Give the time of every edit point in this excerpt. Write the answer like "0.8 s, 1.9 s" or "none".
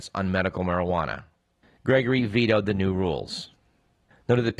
1.8 s